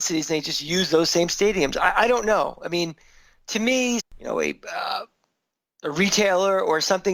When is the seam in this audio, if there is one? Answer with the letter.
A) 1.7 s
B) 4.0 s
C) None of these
B